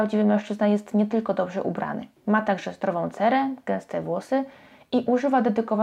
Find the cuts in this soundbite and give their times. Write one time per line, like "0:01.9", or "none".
0:02.2